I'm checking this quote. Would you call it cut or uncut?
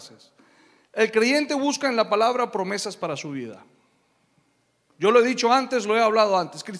cut